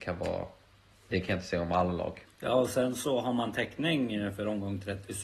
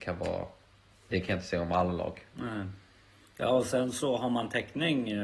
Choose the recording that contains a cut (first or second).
first